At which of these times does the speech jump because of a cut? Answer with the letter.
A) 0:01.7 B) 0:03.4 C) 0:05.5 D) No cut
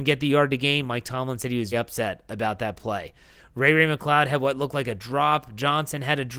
A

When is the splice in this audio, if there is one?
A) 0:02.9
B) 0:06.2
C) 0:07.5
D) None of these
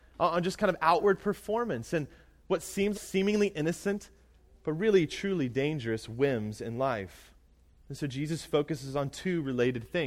A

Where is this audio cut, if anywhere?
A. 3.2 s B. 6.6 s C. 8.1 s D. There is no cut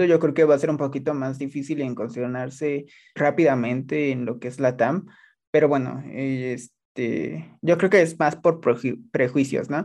A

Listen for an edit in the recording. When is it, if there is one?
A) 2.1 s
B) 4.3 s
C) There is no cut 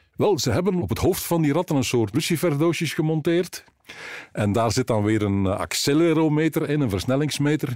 A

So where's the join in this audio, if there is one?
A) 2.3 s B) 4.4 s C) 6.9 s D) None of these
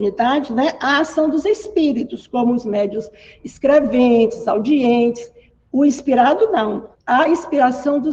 C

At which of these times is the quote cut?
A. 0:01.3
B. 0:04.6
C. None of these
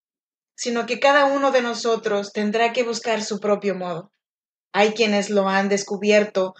B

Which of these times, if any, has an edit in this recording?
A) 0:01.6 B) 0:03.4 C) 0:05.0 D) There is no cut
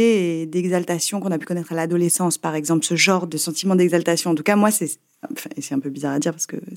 D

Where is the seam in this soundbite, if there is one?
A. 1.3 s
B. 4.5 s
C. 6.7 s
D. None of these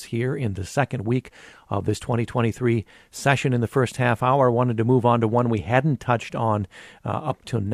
D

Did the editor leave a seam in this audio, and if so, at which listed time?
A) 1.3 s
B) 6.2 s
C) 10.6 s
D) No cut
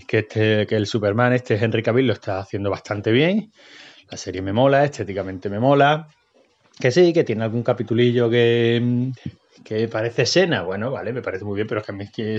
D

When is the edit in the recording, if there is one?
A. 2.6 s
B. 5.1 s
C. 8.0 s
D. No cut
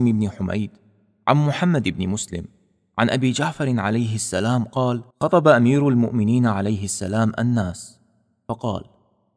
B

